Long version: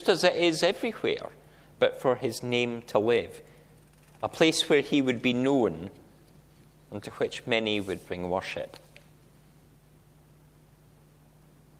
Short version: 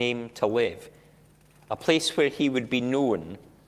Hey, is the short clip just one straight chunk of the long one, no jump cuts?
yes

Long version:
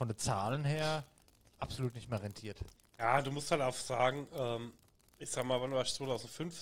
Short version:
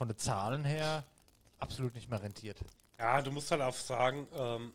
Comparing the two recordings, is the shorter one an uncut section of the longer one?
yes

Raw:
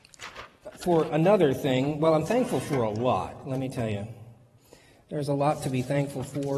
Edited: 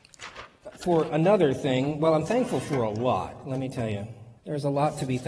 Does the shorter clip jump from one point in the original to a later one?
yes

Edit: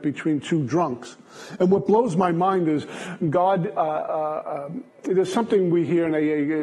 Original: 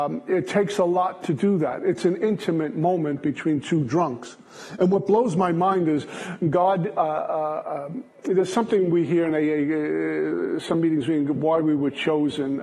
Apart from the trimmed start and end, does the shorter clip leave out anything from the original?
no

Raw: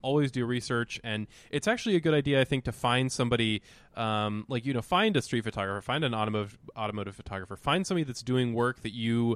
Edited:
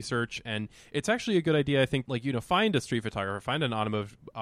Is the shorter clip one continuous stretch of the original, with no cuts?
no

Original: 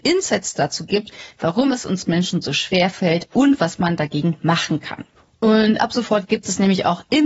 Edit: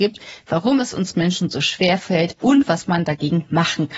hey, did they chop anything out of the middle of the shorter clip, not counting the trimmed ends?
no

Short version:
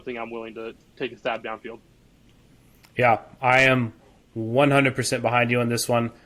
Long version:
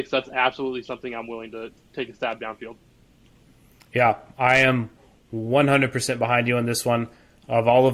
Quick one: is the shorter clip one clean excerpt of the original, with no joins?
yes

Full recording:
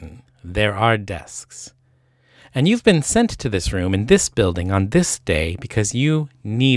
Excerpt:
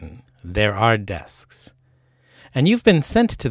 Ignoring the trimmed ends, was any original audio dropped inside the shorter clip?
no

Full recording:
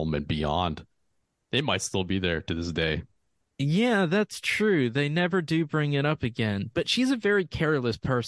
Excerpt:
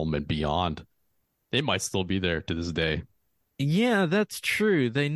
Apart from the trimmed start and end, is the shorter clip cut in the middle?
no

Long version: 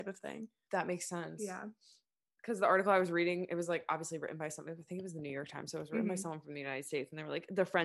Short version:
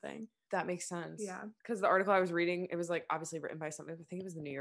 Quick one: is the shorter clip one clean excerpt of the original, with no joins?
no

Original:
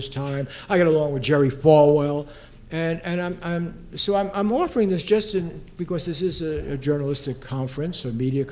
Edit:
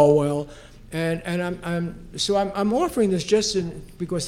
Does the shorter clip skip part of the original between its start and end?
no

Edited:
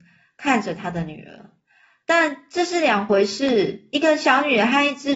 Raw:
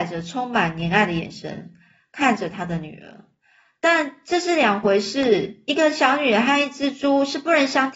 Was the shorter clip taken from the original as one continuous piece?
yes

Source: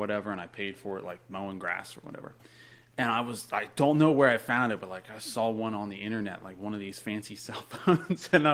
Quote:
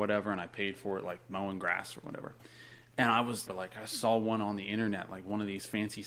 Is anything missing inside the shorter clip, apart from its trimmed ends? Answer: yes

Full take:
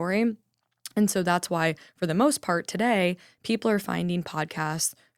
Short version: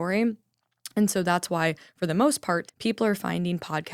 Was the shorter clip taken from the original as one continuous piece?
no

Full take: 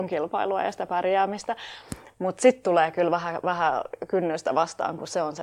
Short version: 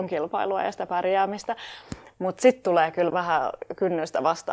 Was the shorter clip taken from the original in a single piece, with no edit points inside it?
no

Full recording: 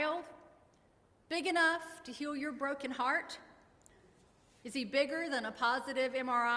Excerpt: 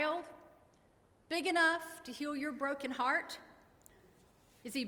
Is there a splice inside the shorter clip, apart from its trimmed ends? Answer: no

